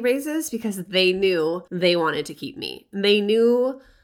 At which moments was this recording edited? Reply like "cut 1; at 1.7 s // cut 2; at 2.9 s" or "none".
cut 1; at 1.7 s